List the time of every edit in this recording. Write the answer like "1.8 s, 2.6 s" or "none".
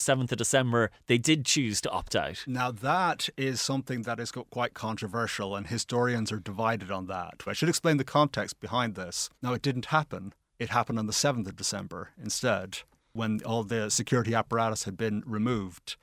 7.5 s, 9.4 s